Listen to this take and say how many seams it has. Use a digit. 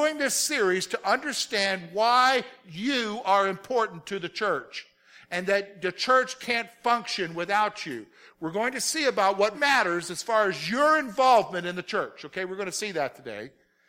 1